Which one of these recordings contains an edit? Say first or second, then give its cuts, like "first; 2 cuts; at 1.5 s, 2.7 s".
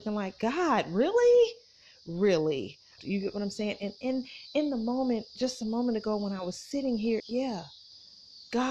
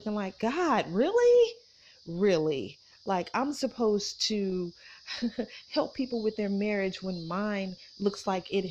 first; 2 cuts; at 3.0 s, 7.2 s